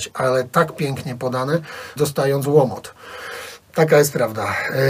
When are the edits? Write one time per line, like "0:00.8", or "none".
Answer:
0:02.0